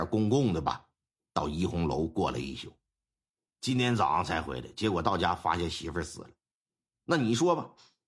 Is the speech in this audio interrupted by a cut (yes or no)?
no